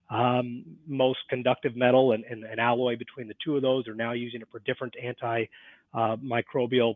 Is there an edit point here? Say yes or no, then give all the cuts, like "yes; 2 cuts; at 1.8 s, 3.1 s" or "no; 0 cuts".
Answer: no; 0 cuts